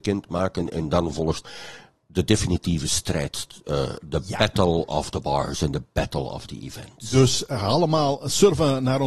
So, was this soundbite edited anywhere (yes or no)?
no